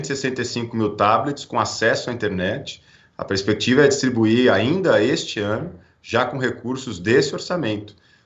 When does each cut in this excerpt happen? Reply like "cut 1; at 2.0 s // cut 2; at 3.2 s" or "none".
none